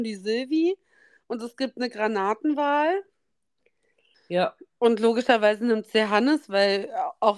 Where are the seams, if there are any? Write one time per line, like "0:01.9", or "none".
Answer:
0:04.1